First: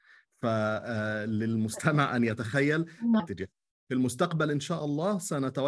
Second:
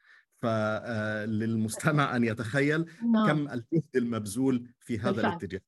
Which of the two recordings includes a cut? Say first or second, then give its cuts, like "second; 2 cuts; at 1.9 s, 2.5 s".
first; 1 cut; at 3.2 s